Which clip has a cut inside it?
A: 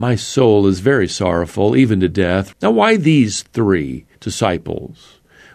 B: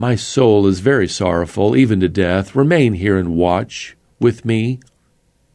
A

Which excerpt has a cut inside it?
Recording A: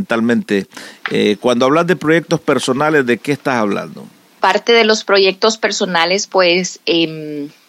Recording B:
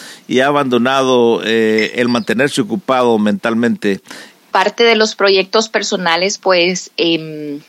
B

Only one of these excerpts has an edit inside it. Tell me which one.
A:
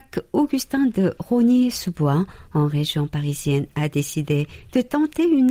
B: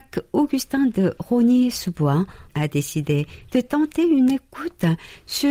B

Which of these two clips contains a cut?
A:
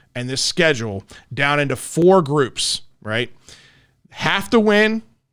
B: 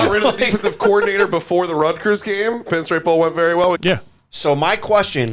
B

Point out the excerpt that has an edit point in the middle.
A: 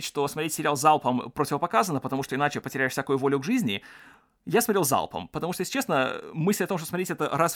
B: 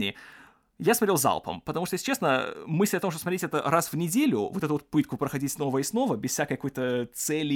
A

